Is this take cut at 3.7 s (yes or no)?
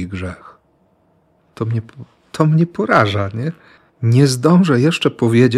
no